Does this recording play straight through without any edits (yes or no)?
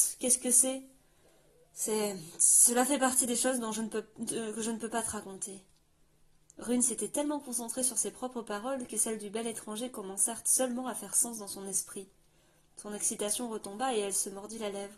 yes